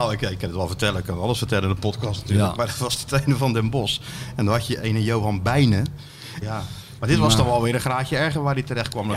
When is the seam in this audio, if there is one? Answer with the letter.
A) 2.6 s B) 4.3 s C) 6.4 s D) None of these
C